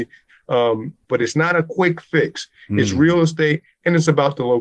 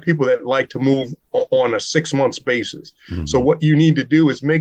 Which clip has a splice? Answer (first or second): first